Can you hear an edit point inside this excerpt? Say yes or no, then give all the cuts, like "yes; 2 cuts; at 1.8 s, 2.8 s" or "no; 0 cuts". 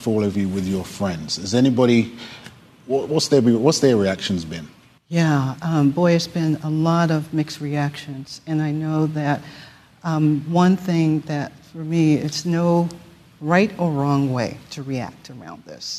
no; 0 cuts